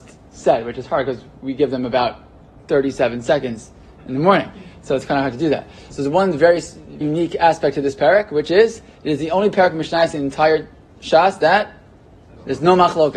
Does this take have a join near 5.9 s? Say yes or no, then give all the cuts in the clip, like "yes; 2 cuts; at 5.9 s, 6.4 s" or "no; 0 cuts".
yes; 2 cuts; at 5.9 s, 7.0 s